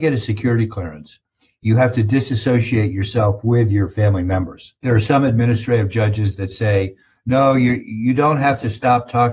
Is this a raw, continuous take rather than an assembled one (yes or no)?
no